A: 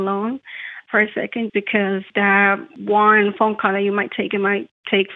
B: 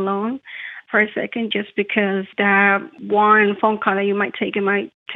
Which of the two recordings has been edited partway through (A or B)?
A